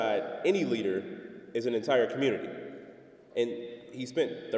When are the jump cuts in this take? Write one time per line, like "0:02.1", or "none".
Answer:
0:03.3